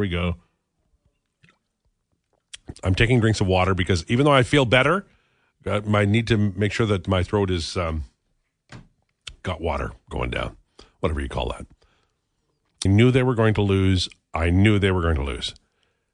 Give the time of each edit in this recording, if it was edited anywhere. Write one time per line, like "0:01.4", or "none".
0:02.7
0:12.9